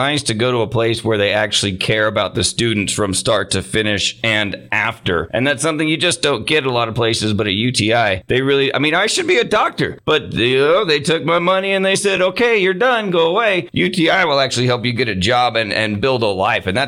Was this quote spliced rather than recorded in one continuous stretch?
no; 0 cuts

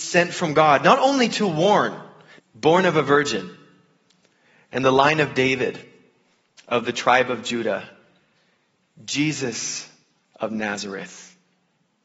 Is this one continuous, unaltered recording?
no; 1 cut; at 2.4 s

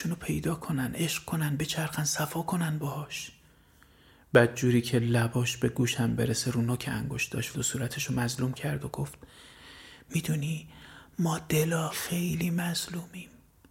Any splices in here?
yes; 2 cuts; at 7.5 s, 11.9 s

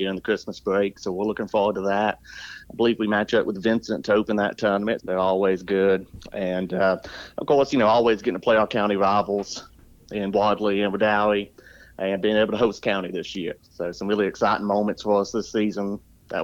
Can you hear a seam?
yes; 1 cut; at 5.0 s

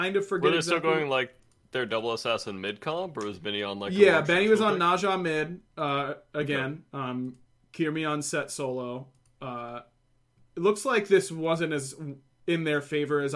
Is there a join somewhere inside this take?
no; 0 cuts

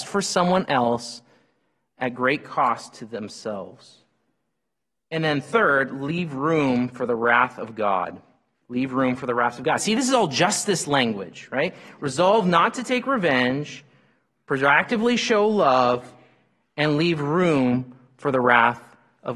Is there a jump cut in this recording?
no; 0 cuts

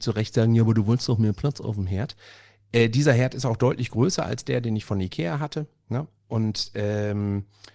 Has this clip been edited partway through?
no; 0 cuts

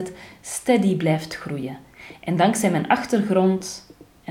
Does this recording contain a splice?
no; 0 cuts

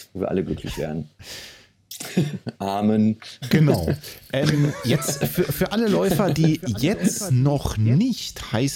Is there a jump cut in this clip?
no; 0 cuts

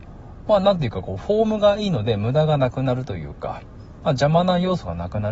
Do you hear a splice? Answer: no; 0 cuts

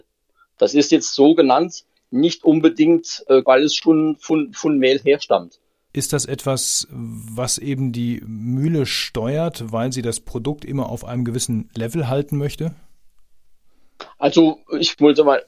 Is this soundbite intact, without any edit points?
no; 2 cuts; at 3.4 s, 5.9 s

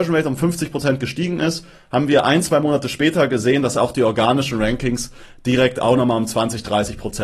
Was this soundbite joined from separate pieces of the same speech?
no; 0 cuts

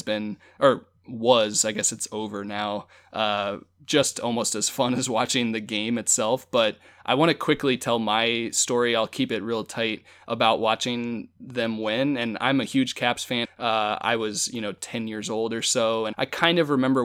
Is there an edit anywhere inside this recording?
yes; 2 cuts; at 13.4 s, 16.1 s

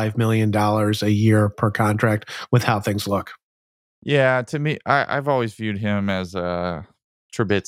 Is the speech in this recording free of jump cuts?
yes; 0 cuts

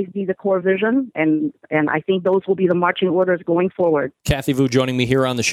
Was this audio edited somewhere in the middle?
yes; 1 cut; at 4.2 s

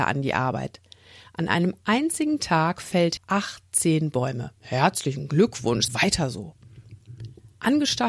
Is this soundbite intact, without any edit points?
no; 3 cuts; at 3.2 s, 4.6 s, 5.9 s

